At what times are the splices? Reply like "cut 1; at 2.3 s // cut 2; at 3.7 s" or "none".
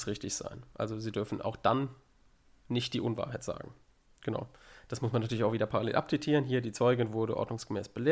none